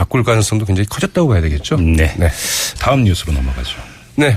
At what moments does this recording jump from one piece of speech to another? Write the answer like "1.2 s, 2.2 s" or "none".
2.8 s